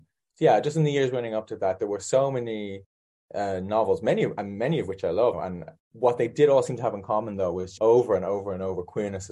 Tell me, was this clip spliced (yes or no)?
yes